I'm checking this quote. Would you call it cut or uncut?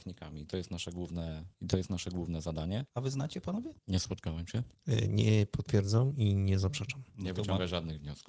cut